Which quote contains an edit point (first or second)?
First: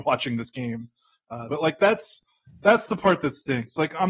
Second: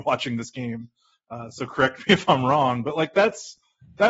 first